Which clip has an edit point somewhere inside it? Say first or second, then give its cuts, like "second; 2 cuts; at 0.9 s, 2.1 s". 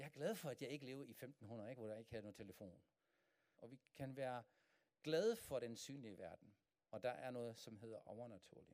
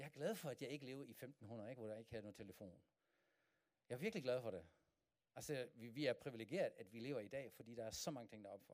first; 2 cuts; at 3.6 s, 6.7 s